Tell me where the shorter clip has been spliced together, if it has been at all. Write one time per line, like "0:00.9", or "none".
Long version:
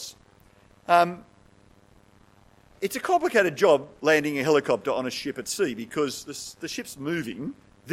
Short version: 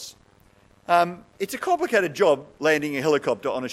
0:01.3